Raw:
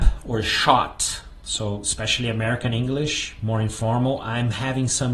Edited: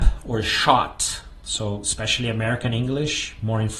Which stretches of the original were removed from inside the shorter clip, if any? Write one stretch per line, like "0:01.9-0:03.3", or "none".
none

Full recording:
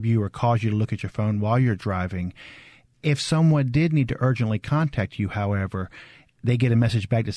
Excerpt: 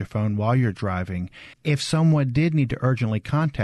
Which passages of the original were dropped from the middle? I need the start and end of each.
0:02.6-0:02.9

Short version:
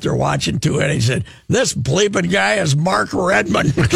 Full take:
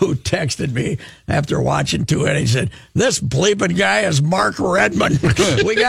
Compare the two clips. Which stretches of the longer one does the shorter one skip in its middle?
none

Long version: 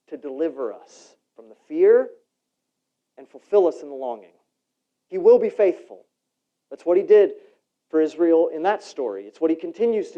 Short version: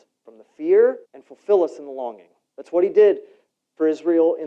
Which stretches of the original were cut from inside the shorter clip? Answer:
0:02.2-0:03.1
0:04.5-0:06.6

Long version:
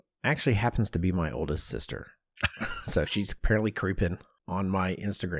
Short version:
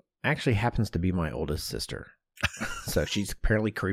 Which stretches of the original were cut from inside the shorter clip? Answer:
none

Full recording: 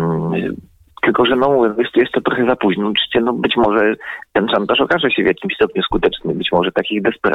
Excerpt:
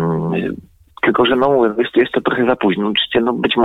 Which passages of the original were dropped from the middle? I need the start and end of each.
none

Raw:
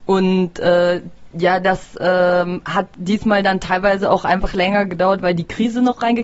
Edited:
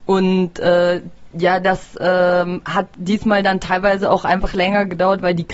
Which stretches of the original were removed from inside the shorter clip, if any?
none

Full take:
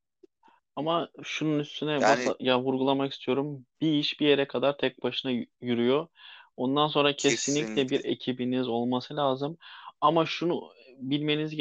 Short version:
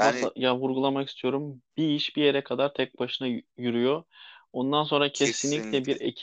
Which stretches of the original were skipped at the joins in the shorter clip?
none

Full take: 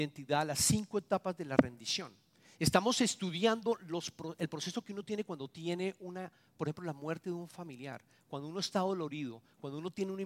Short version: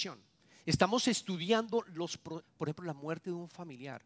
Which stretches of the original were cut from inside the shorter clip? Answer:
0:04.4-0:06.4

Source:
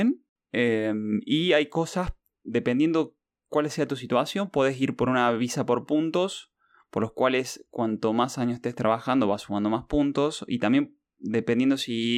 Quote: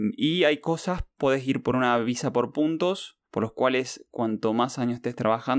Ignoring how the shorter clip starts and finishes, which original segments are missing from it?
0:02.3-0:04.5
0:06.6-0:06.8

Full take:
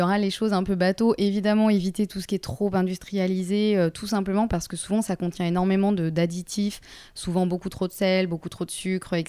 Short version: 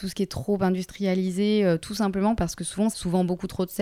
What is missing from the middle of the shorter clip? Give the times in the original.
0:05.0-0:07.1

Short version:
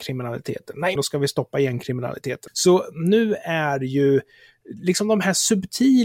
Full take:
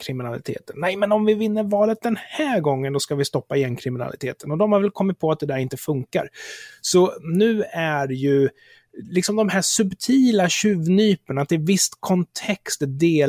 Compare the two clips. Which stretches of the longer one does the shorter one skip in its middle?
0:01.0-0:02.9
0:04.4-0:06.8

